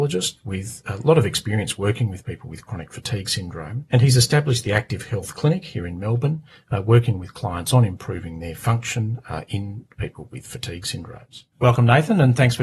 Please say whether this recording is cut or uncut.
uncut